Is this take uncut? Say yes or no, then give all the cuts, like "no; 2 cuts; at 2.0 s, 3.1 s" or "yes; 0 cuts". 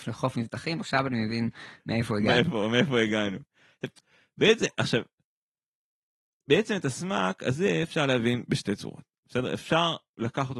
yes; 0 cuts